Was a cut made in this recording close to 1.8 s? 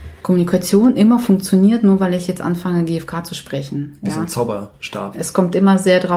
no; 1 cut; at 5.1 s

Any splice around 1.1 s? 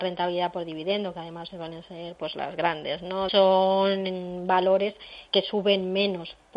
no; 2 cuts; at 3.3 s, 5.3 s

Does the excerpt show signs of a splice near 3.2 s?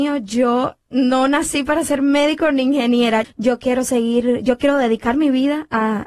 yes; 1 cut; at 3.2 s

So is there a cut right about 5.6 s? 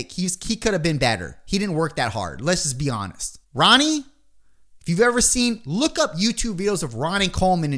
no; 1 cut; at 3.4 s

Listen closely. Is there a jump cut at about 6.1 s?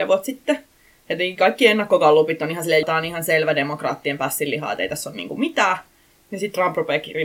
no; 1 cut; at 2.8 s

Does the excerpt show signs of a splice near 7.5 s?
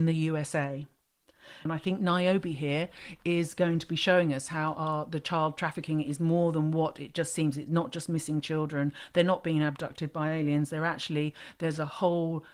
no; 1 cut; at 1.7 s

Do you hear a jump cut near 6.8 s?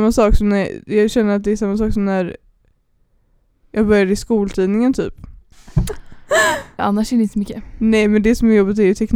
yes; 2 cuts; at 5.5 s, 6.8 s

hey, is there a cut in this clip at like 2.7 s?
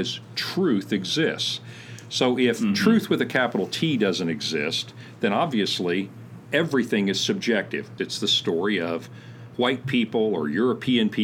no; 2 cuts; at 8.0 s, 9.5 s

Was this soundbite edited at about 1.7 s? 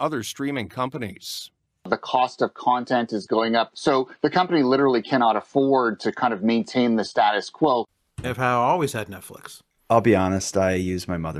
no; 2 cuts; at 3.7 s, 8.2 s

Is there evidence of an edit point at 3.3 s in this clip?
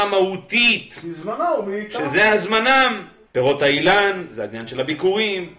yes; 1 cut; at 3.3 s

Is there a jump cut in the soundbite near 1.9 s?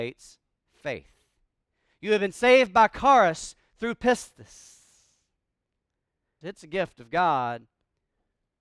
no; 1 cut; at 6.4 s

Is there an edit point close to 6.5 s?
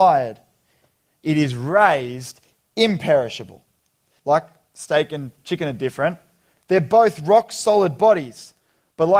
yes; 2 cuts; at 4.2 s, 6.5 s

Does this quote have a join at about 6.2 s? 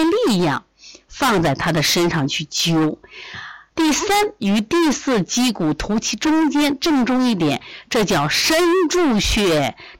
no; 1 cut; at 3.7 s

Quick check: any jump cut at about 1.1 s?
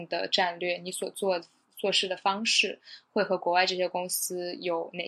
no; 0 cuts

